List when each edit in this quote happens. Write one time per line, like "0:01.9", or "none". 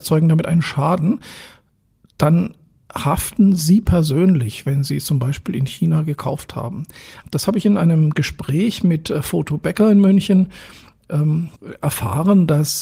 0:07.2